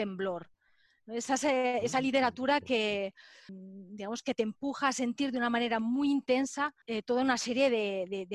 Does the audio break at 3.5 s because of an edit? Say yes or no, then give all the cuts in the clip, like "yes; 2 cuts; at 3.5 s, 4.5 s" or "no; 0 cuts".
yes; 2 cuts; at 3.5 s, 6.8 s